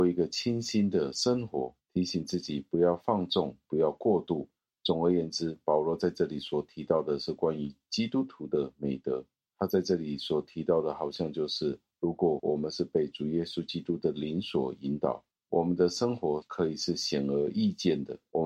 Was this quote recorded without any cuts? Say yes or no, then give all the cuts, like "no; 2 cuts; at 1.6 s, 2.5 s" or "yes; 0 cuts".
yes; 0 cuts